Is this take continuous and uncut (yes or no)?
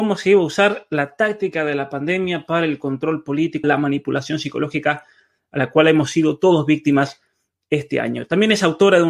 no